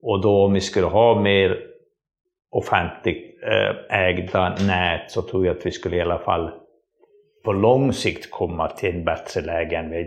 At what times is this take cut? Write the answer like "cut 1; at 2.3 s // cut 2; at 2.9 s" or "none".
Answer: none